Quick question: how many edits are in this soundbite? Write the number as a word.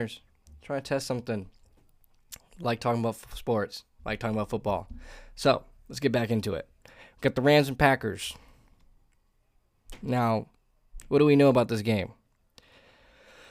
zero